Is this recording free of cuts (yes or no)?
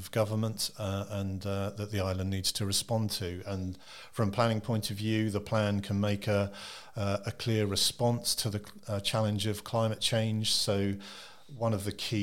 yes